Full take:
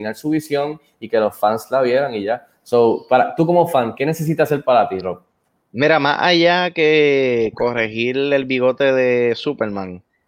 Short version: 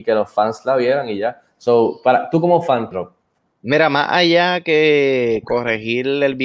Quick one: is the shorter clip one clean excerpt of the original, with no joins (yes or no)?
no